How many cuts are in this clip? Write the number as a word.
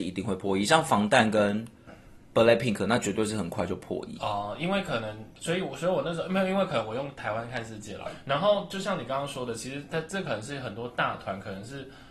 two